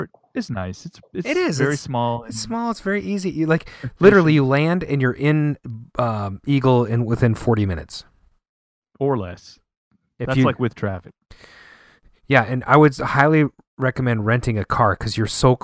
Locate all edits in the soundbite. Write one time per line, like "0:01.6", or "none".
none